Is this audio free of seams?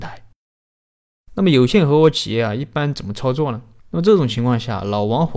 no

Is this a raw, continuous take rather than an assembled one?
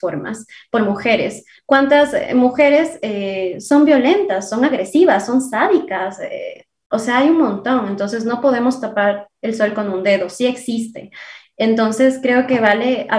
no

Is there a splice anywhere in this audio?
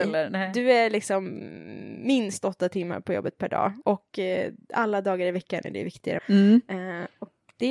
yes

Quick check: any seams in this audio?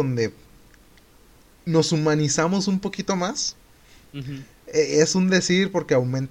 no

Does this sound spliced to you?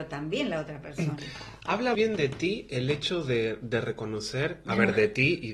yes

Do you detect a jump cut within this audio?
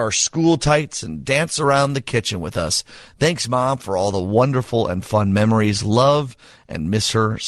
no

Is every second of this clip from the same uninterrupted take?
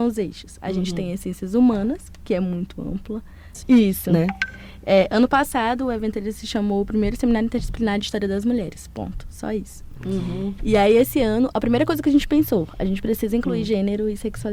no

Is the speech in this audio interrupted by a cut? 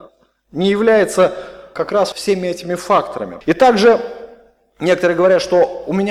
yes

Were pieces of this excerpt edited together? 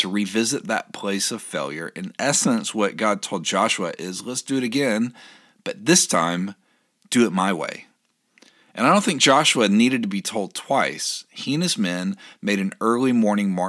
no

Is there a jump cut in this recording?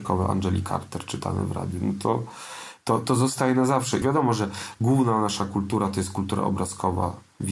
yes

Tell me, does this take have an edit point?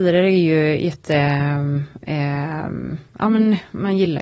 no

